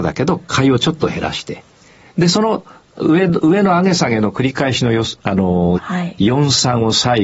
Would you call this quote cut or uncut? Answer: cut